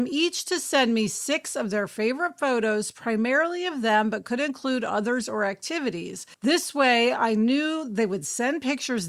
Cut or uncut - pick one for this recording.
cut